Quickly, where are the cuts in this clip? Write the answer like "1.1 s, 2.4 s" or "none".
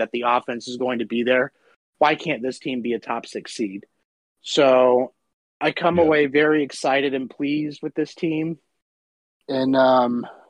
none